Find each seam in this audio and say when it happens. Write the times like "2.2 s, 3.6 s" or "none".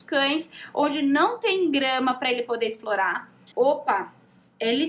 3.5 s